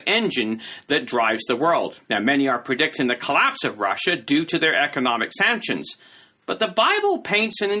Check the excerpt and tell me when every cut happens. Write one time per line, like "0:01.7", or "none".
0:02.0